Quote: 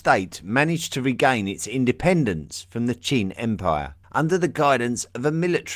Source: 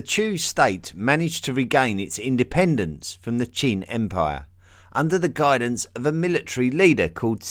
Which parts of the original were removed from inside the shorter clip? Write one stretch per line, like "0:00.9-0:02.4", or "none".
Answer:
0:04.6-0:04.8